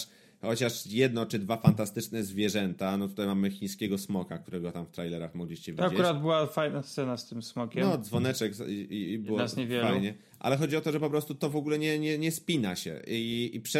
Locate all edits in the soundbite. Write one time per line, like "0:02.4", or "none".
none